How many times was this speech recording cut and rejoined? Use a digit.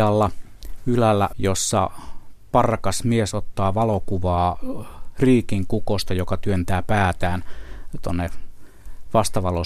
1